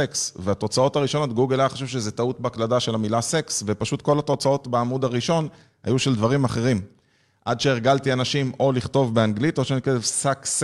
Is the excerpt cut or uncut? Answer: uncut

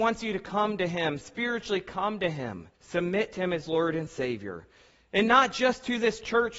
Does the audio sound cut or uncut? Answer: cut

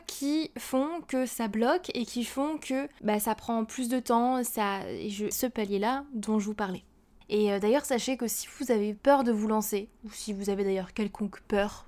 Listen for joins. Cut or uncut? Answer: cut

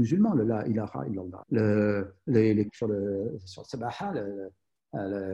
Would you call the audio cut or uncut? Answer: cut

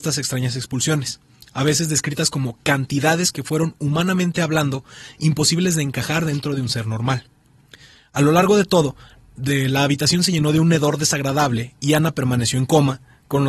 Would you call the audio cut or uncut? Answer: uncut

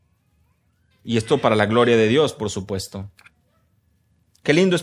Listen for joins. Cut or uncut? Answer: cut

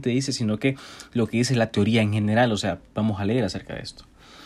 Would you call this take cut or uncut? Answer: uncut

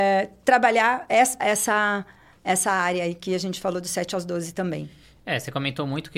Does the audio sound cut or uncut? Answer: cut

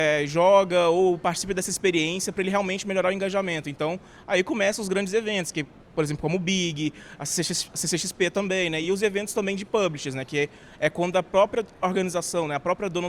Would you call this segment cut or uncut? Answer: uncut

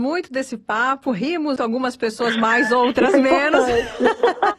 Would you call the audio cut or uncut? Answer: cut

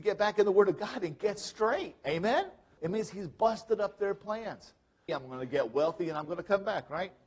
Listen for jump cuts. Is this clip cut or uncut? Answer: cut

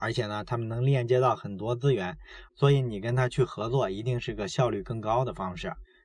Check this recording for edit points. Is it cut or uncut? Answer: cut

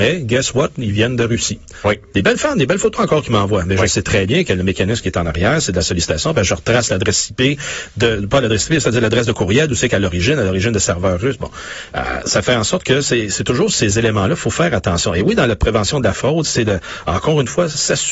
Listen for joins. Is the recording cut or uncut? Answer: uncut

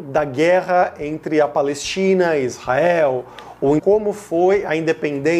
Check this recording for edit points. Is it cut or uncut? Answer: cut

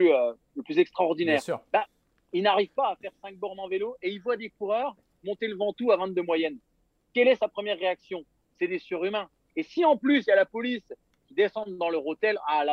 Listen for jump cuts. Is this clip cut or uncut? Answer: uncut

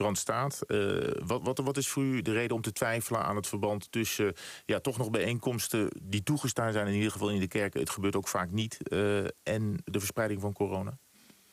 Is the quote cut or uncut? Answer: uncut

